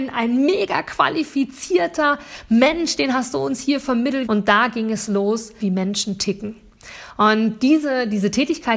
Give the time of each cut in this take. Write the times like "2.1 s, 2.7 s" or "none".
4.2 s, 5.6 s